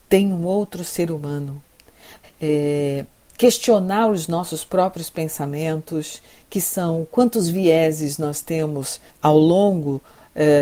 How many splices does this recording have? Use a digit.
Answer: 2